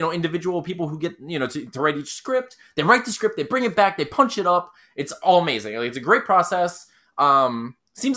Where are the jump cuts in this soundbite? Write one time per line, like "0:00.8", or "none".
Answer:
none

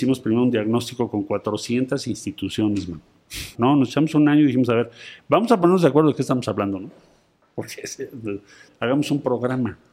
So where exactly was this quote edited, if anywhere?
0:03.5
0:08.7

